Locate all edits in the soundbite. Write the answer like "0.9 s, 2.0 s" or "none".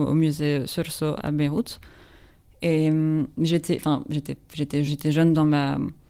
1.2 s, 4.9 s